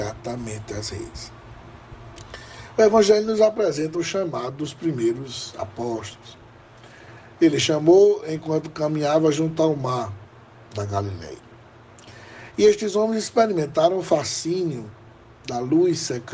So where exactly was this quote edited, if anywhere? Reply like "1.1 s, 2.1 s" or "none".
none